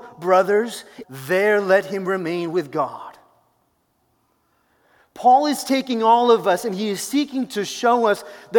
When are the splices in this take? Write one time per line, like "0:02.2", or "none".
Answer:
0:01.0